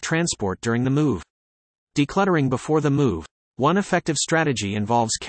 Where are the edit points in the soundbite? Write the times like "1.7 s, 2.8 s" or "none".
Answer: 3.4 s